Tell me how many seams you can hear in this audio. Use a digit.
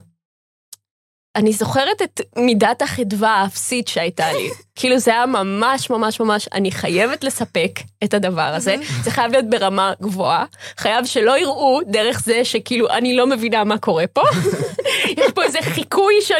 0